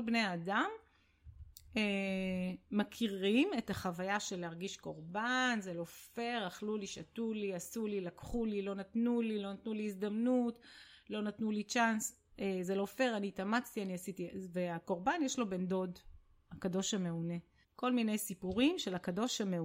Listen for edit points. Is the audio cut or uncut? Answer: cut